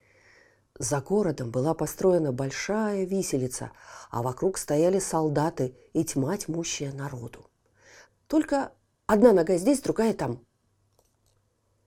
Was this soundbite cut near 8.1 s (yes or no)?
yes